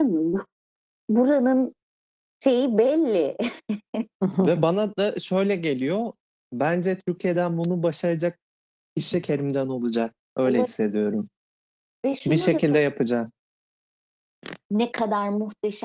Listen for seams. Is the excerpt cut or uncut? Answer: uncut